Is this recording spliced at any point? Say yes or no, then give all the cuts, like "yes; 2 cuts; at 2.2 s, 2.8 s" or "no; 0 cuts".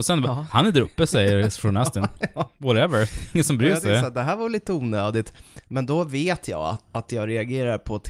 no; 0 cuts